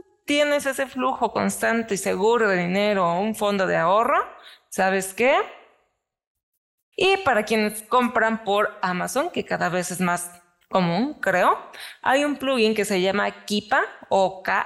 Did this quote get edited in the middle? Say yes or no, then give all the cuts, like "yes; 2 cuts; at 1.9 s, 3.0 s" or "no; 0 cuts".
yes; 1 cut; at 6.9 s